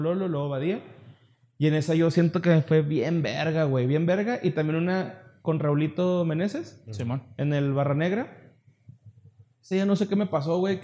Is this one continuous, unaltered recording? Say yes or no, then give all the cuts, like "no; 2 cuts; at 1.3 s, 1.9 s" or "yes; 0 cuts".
yes; 0 cuts